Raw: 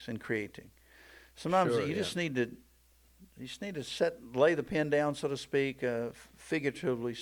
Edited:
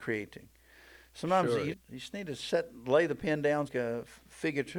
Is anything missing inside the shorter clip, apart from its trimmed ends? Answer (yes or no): yes